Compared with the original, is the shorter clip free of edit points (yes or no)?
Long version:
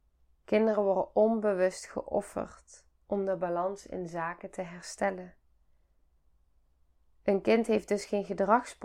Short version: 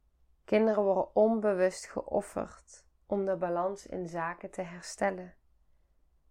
yes